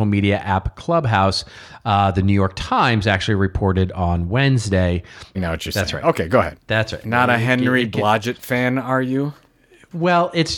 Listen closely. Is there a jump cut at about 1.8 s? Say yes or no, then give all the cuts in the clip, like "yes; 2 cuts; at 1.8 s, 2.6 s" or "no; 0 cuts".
no; 2 cuts; at 5.3 s, 7.0 s